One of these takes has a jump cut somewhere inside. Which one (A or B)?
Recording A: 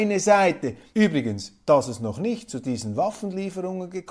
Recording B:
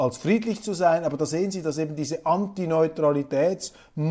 A